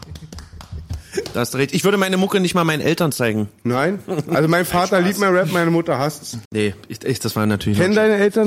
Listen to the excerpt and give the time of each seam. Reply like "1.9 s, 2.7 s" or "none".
6.4 s